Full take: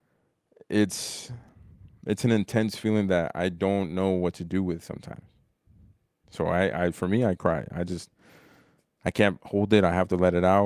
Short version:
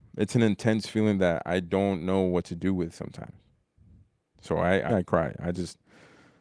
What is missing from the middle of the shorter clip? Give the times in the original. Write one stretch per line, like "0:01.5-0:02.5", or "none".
0:06.8-0:07.2